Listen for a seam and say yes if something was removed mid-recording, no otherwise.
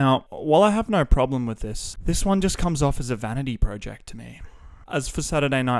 yes